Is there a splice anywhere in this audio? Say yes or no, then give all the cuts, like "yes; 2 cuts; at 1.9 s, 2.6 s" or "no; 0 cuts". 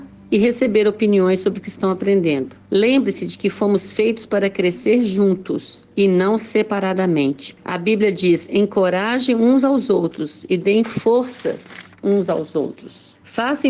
no; 0 cuts